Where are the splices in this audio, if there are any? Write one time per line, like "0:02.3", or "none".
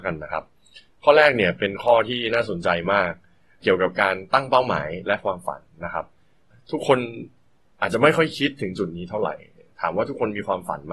none